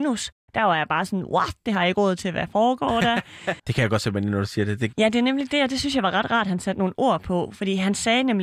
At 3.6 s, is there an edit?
yes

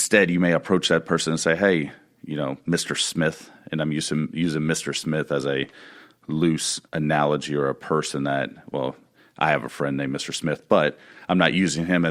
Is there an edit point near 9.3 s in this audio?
no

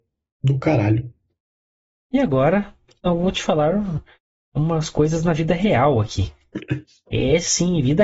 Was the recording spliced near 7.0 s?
no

